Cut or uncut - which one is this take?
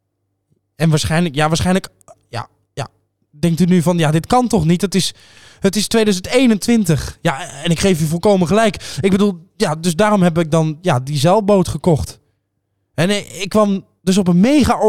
uncut